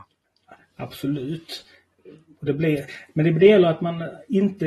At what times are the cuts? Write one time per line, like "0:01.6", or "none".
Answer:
0:02.3